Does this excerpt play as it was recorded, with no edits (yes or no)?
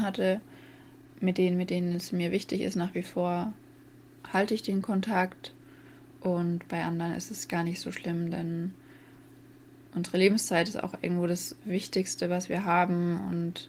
no